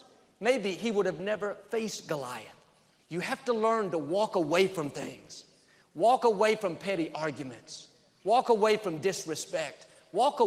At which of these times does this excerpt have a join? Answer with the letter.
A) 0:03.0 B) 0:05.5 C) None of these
A